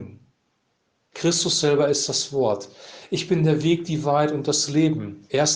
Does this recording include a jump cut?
yes; 1 cut; at 1.1 s

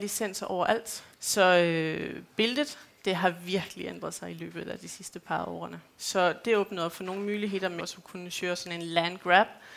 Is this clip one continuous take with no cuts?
no; 3 cuts; at 1.1 s, 6.0 s, 7.8 s

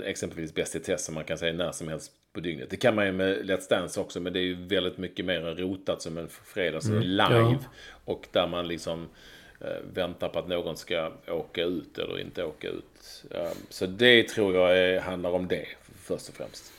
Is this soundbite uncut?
no; 1 cut; at 7.0 s

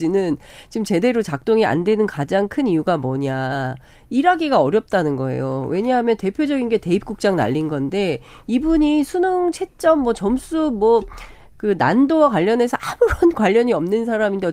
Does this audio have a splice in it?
no; 0 cuts

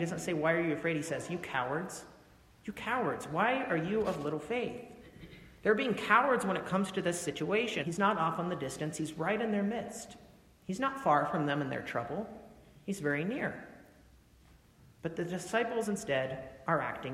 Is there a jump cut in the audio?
yes; 1 cut; at 7.8 s

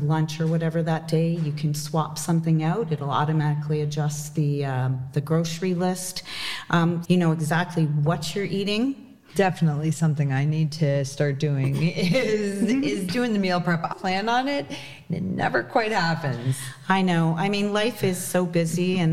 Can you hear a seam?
yes; 3 cuts; at 7.0 s, 9.3 s, 13.9 s

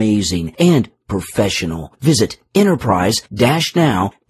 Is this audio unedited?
yes; 0 cuts

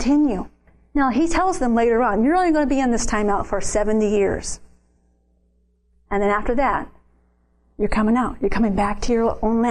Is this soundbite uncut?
yes; 0 cuts

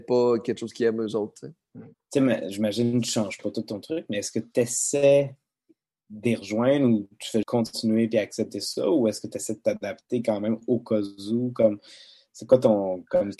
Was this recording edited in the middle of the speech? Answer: yes; 2 cuts; at 1.9 s, 7.4 s

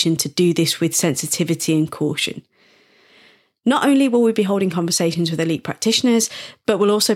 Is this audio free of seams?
yes; 0 cuts

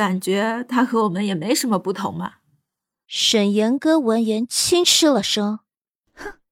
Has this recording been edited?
yes; 1 cut; at 3.0 s

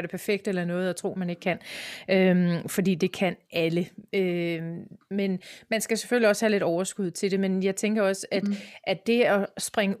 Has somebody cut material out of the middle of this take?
no; 0 cuts

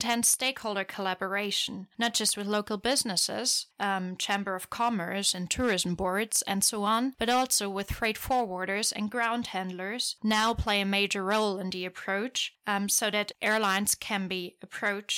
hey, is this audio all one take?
yes; 0 cuts

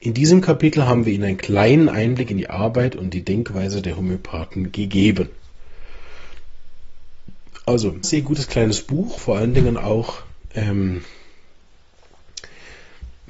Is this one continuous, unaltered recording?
no; 2 cuts; at 8.0 s, 9.2 s

